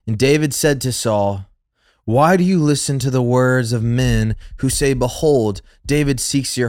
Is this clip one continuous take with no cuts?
yes; 0 cuts

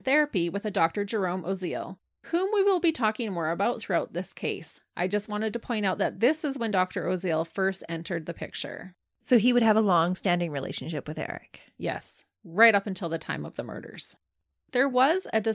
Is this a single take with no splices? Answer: yes; 0 cuts

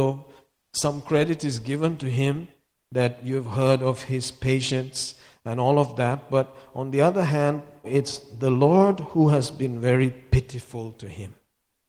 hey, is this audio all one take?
no; 1 cut; at 7.8 s

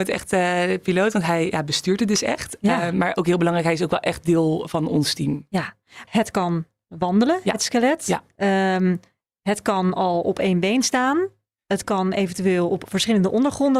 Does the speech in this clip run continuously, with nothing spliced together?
no; 1 cut; at 6.1 s

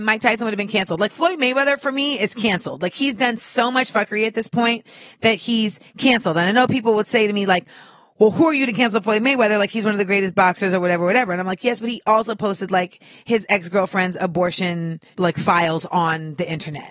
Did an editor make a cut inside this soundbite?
no; 0 cuts

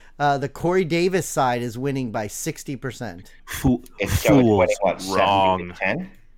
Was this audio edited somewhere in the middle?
yes; 1 cut; at 3.4 s

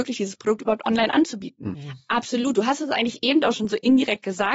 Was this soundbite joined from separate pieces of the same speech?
yes; 1 cut; at 1.7 s

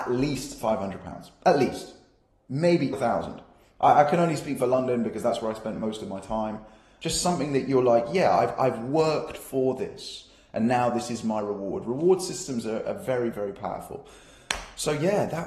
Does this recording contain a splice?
yes; 2 cuts; at 2.9 s, 7.0 s

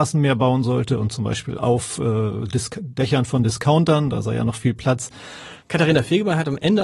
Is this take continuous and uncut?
no; 1 cut; at 5.6 s

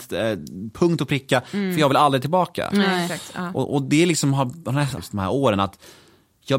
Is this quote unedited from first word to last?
no; 1 cut; at 5.0 s

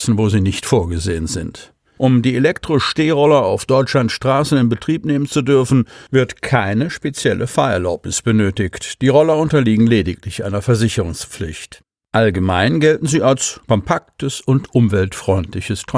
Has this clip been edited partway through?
yes; 1 cut; at 2.0 s

